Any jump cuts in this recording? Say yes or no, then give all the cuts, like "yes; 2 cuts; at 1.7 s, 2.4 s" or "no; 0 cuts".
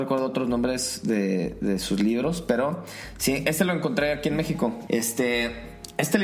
yes; 1 cut; at 4.9 s